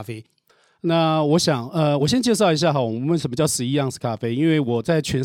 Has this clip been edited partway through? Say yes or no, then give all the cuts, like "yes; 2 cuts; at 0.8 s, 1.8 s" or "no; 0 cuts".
no; 0 cuts